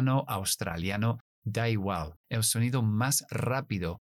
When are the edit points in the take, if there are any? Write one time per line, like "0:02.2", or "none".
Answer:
0:02.2